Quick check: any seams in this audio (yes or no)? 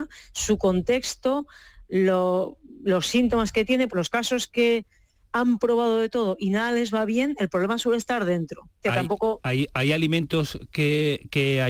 yes